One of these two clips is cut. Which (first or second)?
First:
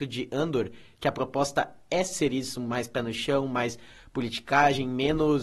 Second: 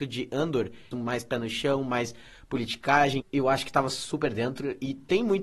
second